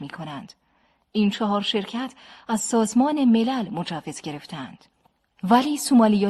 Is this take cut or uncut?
uncut